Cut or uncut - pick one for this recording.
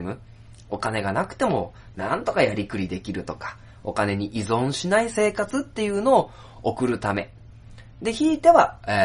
uncut